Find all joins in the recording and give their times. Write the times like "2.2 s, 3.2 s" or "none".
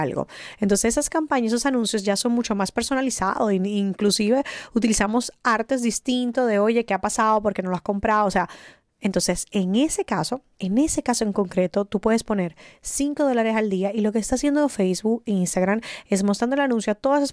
10.5 s